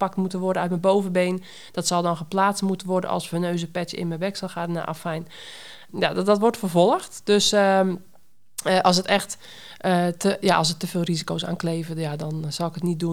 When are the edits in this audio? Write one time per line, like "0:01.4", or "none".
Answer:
none